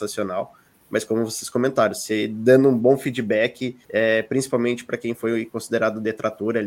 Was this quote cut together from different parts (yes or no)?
yes